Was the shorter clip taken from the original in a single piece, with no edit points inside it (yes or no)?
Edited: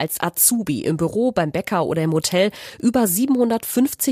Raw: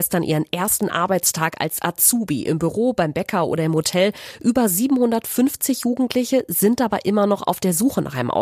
yes